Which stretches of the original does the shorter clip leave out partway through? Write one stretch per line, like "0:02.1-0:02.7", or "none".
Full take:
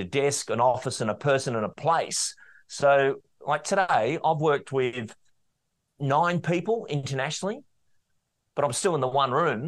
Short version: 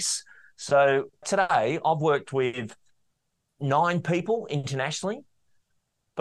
0:03.3-0:03.6